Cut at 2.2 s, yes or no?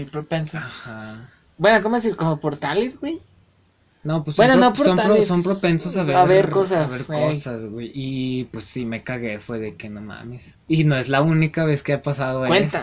no